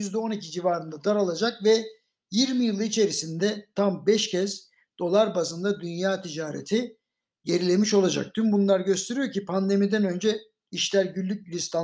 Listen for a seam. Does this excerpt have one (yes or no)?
no